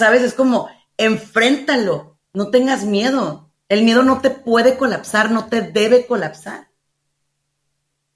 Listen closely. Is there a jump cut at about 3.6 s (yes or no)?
yes